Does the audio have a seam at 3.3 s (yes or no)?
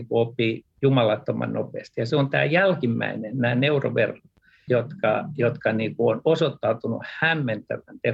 no